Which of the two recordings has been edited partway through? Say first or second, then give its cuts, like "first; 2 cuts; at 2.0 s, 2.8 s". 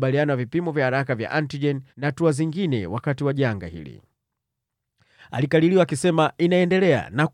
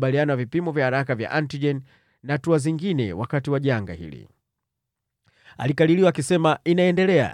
first; 1 cut; at 1.9 s